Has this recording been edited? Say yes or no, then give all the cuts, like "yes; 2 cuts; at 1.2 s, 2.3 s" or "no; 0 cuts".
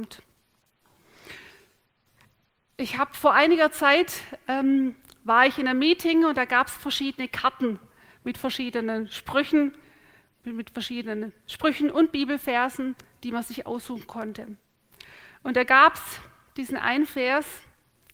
no; 0 cuts